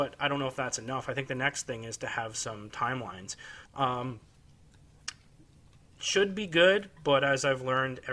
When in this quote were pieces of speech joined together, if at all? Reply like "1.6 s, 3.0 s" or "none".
3.7 s